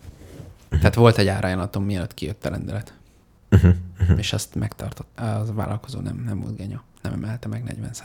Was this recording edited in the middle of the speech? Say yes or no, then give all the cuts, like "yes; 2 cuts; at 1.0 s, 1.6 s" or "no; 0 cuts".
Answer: yes; 1 cut; at 5.2 s